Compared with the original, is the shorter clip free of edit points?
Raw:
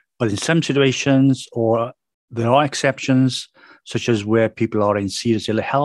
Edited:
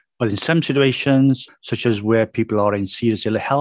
no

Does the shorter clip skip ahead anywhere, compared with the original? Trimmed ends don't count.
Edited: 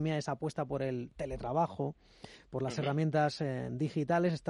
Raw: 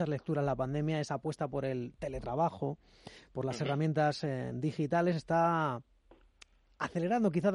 no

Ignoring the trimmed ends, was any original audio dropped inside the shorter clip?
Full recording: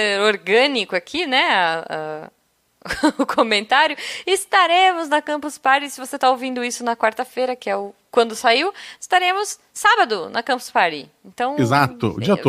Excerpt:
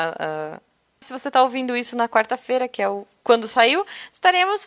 yes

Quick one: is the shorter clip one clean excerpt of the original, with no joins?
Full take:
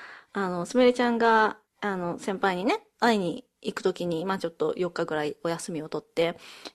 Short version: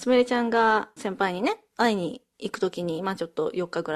no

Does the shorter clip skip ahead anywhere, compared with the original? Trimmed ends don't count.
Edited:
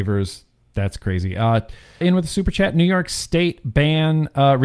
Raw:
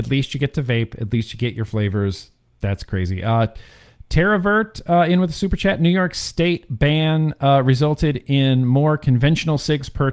yes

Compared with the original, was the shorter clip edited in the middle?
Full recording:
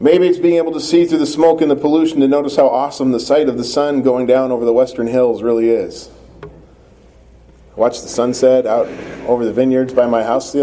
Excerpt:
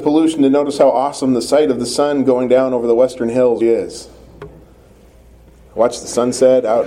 yes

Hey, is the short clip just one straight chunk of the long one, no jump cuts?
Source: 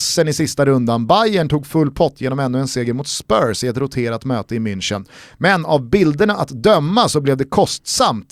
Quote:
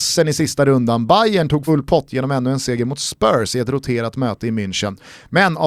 no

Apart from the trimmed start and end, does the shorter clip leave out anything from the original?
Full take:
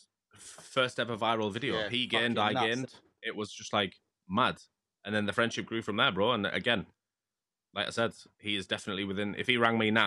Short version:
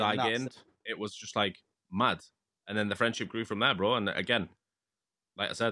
no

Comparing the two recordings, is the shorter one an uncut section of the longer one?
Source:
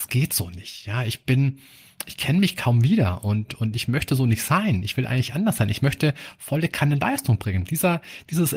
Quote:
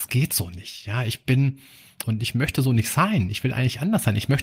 no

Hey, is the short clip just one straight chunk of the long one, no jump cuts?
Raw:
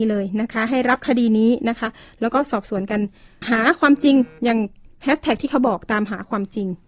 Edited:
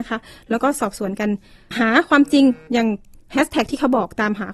yes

